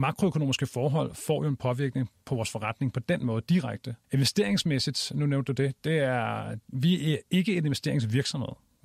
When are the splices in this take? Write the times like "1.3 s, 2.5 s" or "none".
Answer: 4.0 s